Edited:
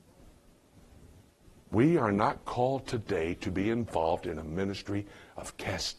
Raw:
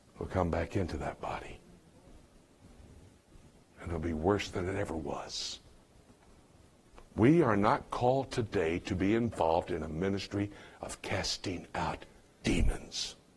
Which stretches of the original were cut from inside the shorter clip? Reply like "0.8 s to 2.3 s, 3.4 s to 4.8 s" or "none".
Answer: 3.5 s to 7.1 s